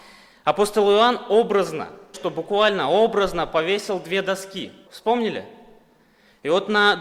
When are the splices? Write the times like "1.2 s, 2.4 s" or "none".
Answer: 2.1 s, 4.9 s